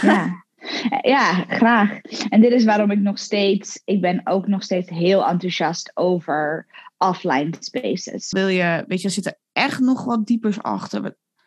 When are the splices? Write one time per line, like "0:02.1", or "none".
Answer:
0:08.3